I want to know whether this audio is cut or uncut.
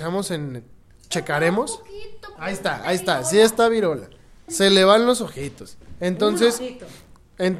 cut